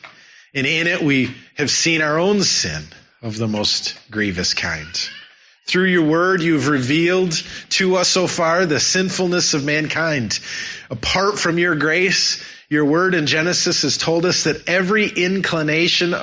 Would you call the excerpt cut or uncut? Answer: uncut